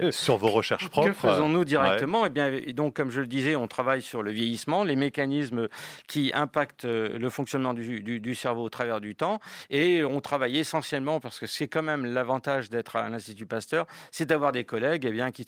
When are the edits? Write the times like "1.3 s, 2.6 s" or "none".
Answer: none